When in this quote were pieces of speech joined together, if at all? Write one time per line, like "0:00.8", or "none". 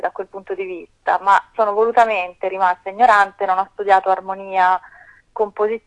none